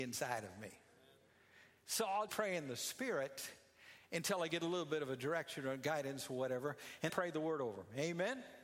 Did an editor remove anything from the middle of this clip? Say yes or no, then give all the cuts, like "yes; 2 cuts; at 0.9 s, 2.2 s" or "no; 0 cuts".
yes; 2 cuts; at 2.3 s, 7.1 s